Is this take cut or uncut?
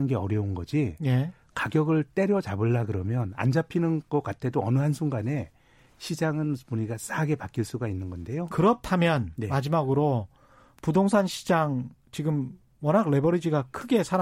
cut